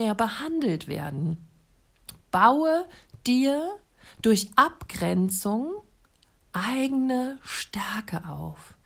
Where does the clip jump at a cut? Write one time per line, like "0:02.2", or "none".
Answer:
none